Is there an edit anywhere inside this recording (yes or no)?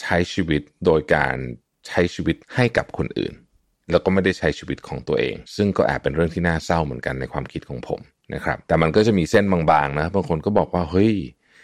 yes